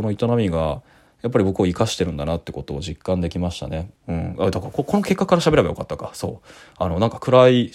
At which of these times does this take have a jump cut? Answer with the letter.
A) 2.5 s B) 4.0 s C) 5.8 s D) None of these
B